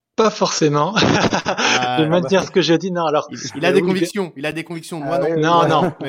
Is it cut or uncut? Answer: uncut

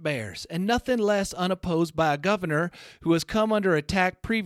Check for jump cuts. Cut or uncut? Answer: uncut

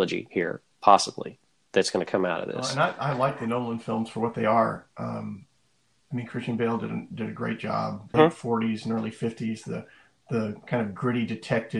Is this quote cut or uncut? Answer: cut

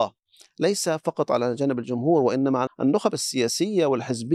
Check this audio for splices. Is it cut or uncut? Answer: cut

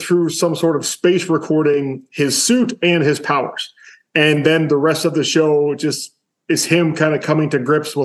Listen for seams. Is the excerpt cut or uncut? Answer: uncut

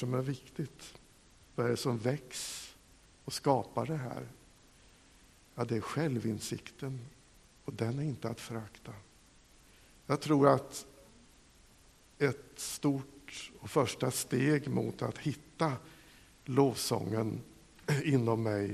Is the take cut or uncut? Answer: uncut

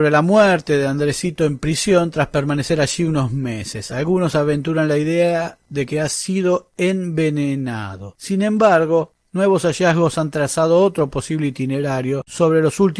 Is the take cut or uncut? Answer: uncut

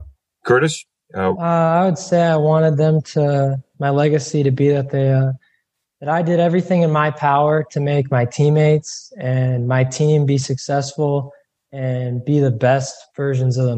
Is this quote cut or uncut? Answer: cut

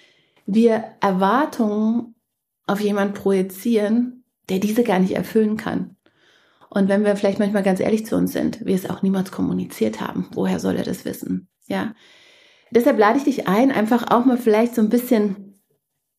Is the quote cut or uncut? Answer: uncut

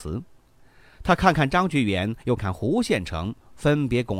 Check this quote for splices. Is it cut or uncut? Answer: cut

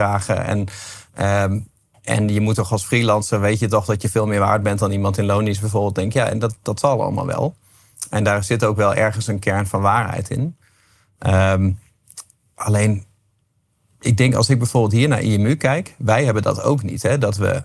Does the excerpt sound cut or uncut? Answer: cut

